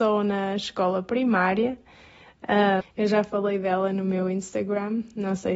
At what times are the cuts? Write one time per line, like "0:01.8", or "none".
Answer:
0:02.8